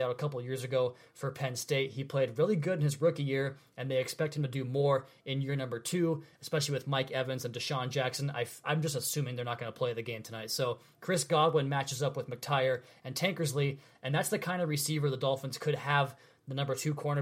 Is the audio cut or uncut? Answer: uncut